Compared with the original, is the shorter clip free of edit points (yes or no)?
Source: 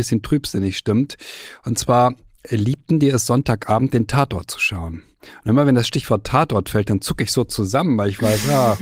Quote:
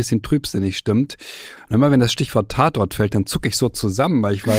no